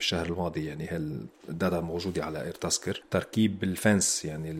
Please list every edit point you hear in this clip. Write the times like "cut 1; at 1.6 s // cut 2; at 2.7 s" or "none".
none

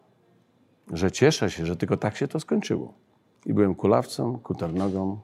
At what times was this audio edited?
cut 1; at 3.4 s

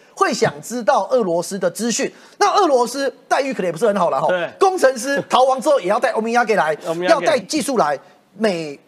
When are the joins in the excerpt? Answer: cut 1; at 7.4 s

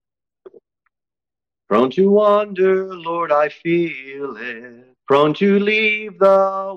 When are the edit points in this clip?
cut 1; at 5.0 s

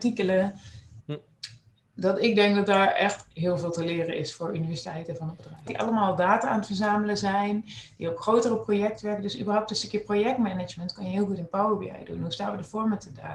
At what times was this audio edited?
cut 1; at 1.0 s // cut 2; at 5.7 s

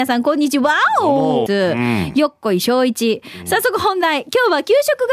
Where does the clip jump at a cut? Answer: cut 1; at 1.5 s

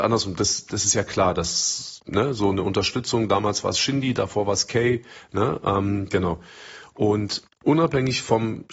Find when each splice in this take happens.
cut 1; at 7.5 s

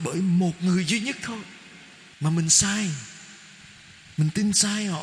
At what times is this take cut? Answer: cut 1; at 2.1 s

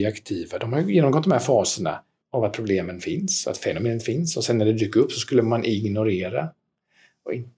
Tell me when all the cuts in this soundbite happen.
cut 1; at 2.2 s

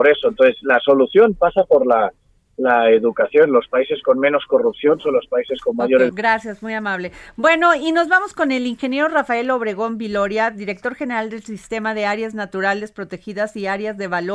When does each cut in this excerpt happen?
cut 1; at 6.1 s

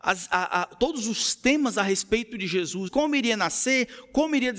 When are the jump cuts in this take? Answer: cut 1; at 2.9 s

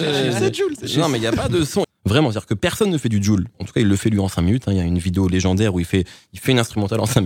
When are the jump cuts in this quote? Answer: cut 1; at 1.8 s // cut 2; at 3.5 s

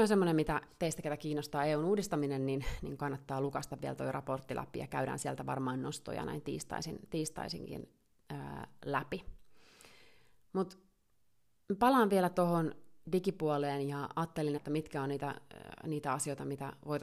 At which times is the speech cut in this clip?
cut 1; at 13.0 s // cut 2; at 14.6 s

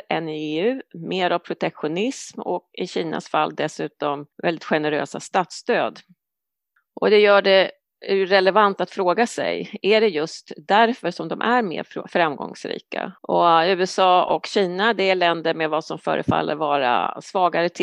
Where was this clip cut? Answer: cut 1; at 4.3 s // cut 2; at 13.2 s

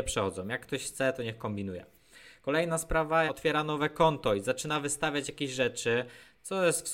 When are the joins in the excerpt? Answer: cut 1; at 3.3 s

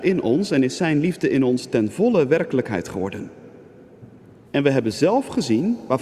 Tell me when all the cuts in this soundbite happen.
cut 1; at 4.4 s

